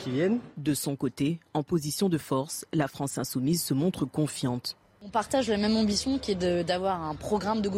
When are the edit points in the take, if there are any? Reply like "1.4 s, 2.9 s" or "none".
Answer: none